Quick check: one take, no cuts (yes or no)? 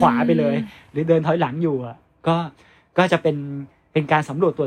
yes